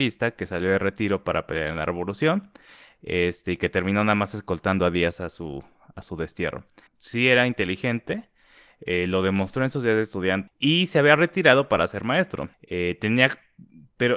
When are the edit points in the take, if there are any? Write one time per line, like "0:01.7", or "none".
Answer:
0:06.9
0:10.5
0:12.5